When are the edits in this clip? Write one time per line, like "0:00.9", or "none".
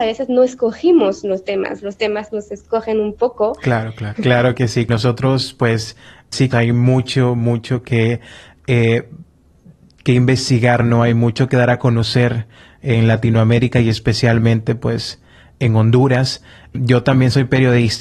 0:04.2
0:06.5